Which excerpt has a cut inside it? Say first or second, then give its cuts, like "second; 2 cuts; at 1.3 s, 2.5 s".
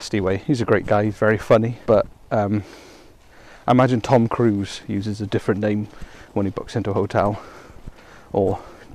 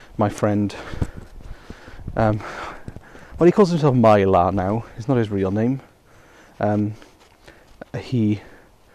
first; 1 cut; at 1.8 s